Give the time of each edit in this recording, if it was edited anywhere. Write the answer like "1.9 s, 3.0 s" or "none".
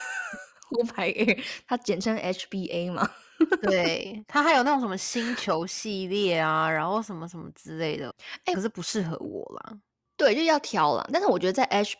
8.5 s